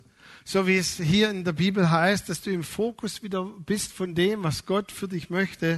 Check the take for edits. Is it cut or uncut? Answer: uncut